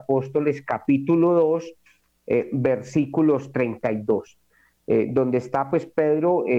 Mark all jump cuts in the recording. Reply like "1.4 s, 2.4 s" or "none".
none